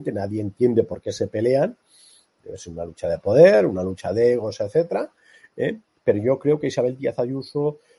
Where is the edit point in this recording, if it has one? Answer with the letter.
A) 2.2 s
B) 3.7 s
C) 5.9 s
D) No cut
D